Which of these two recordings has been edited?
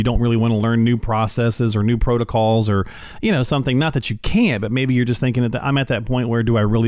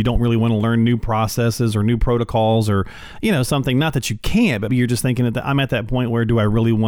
second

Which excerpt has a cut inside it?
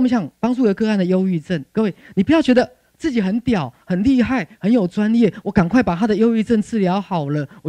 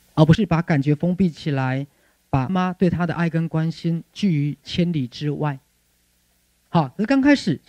second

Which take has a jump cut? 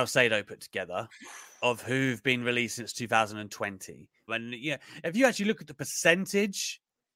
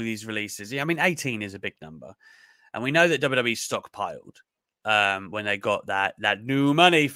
first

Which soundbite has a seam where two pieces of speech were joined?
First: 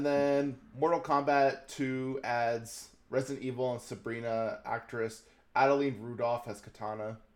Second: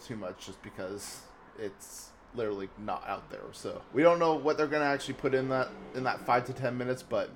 second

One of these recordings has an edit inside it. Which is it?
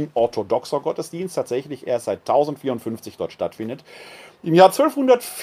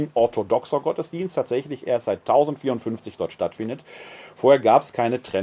first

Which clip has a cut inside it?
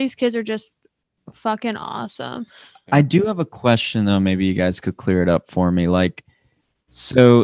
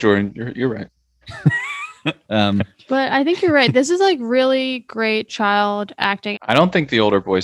second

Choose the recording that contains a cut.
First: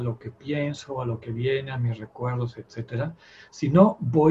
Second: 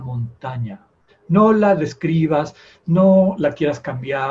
second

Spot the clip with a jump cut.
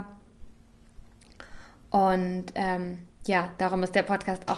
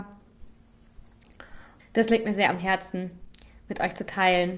second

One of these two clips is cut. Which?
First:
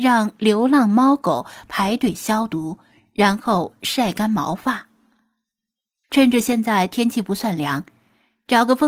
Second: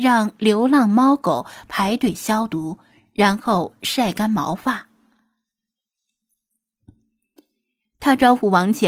first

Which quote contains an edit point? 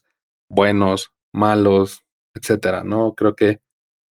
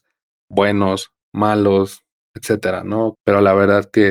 second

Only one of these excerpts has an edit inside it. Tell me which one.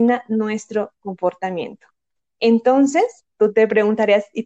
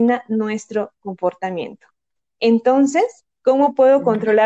second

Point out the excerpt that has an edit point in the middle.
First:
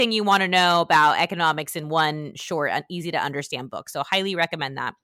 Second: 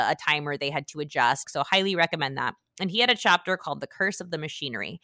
second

